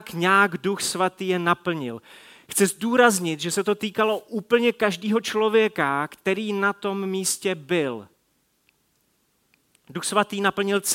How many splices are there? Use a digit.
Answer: 0